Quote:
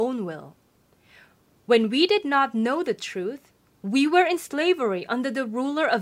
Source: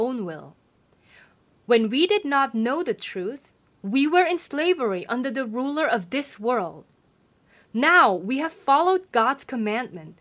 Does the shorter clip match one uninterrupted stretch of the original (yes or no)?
yes